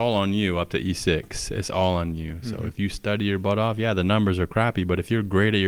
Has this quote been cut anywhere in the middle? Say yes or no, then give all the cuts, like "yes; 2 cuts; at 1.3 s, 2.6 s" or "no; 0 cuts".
no; 0 cuts